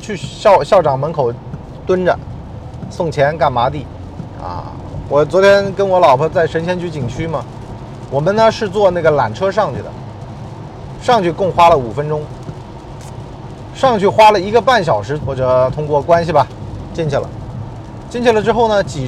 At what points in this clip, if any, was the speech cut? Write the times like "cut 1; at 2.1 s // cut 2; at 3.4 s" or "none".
cut 1; at 5.1 s // cut 2; at 15.2 s